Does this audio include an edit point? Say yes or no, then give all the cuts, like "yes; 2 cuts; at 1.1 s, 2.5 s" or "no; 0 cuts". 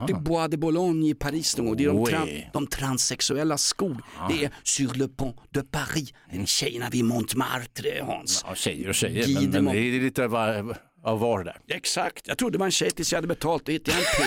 no; 0 cuts